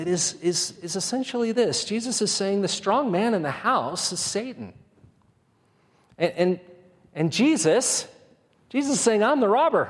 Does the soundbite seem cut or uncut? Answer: uncut